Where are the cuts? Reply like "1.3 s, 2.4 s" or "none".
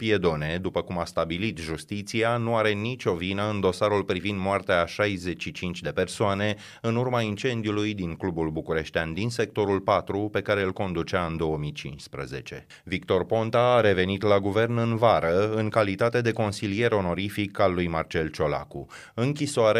12.7 s